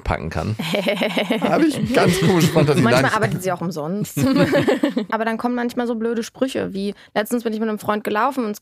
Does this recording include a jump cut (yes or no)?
yes